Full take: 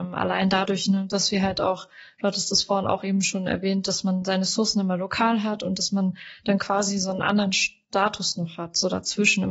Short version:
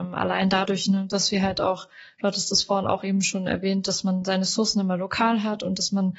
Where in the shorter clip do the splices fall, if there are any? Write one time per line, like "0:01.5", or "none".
none

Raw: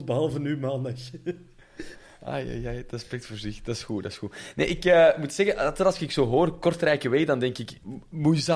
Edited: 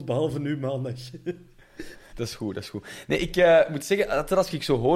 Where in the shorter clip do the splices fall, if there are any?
0:02.1

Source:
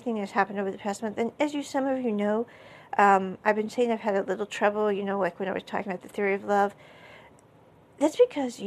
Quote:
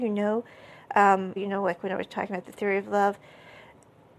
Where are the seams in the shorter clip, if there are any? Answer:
0:01.4

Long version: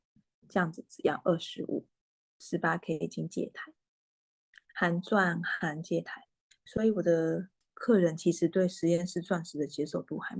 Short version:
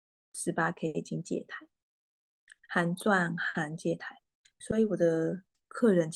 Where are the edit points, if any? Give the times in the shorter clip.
none

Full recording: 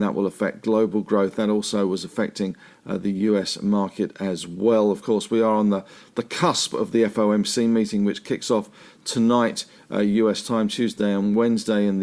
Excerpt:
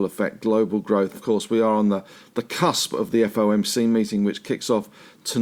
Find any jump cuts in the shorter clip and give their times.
0:01.1

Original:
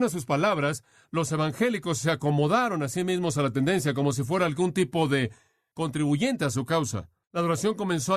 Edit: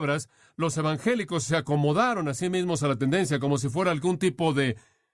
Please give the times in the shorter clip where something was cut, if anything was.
none

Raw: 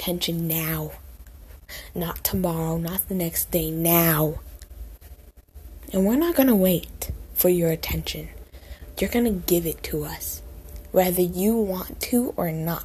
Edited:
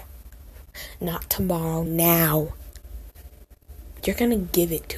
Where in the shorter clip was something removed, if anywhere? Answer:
0:01.9
0:04.0

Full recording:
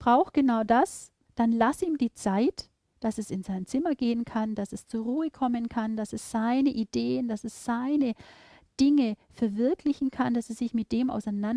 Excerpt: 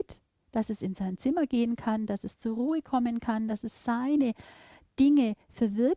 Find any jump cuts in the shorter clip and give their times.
0:03.5

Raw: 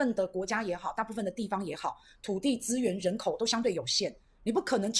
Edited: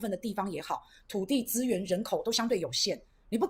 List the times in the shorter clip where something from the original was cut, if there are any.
none

